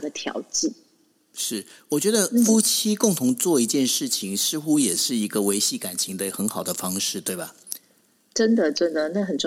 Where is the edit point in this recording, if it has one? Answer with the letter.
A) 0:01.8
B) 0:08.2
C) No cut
C